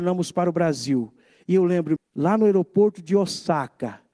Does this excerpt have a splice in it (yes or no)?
yes